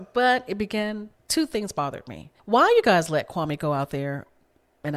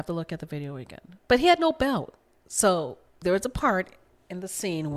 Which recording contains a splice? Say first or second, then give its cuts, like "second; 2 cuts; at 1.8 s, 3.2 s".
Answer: first; 2 cuts; at 1.2 s, 2.4 s